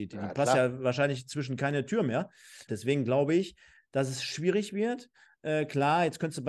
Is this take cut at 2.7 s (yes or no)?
yes